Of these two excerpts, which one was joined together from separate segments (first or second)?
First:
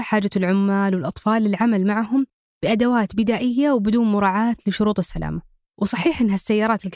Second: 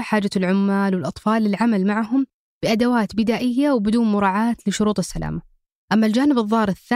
first